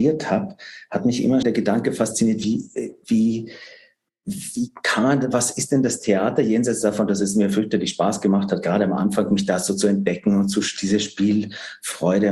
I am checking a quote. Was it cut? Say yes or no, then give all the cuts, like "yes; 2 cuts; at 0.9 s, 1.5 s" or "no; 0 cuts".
yes; 1 cut; at 1.4 s